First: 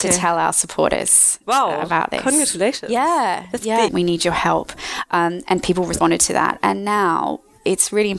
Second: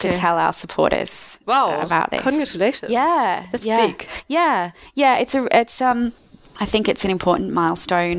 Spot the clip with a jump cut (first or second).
first